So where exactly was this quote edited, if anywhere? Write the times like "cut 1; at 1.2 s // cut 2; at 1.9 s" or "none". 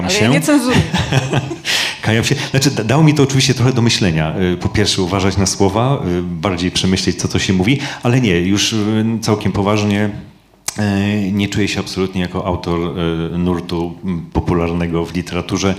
none